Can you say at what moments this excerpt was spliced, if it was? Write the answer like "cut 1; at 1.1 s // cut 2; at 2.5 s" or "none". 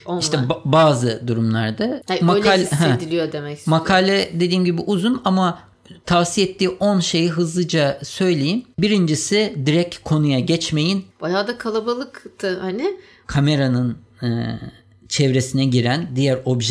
cut 1; at 11.1 s // cut 2; at 13.2 s